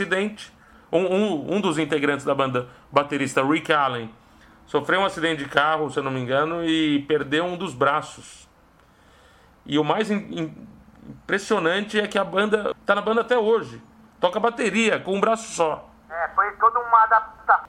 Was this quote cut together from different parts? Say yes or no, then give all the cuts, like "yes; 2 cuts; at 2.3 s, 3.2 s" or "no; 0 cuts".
yes; 1 cut; at 12.7 s